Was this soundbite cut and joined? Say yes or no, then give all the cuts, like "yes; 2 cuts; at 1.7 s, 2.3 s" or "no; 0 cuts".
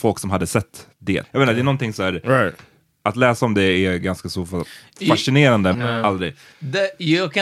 yes; 2 cuts; at 1.2 s, 5.7 s